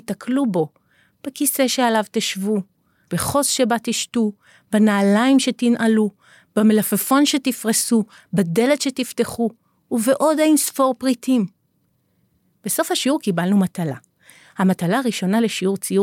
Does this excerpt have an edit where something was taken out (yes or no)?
no